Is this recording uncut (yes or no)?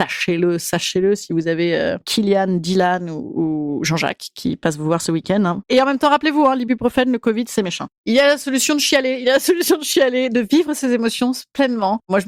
yes